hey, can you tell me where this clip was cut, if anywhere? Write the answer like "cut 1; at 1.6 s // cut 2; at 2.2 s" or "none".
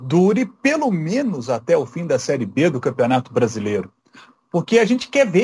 none